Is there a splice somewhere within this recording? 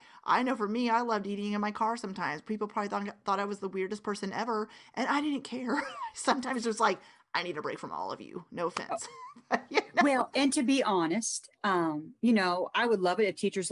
yes; 1 cut; at 10.3 s

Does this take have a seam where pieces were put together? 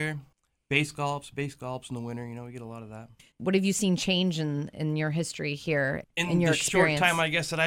no; 0 cuts

